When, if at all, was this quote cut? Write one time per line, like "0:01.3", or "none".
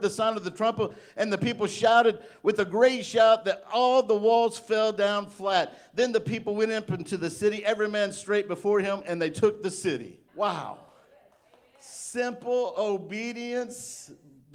0:10.3